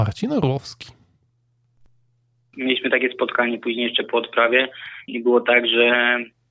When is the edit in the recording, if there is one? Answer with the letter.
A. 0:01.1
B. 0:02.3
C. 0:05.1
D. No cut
C